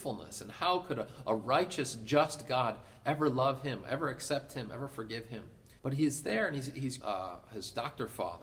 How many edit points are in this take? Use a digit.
2